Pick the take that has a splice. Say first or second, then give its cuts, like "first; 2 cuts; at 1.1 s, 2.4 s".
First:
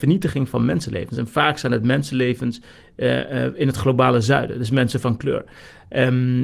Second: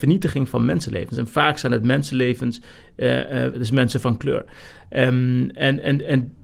second; 1 cut; at 3.5 s